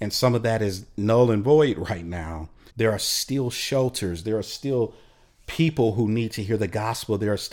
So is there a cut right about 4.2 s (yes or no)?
no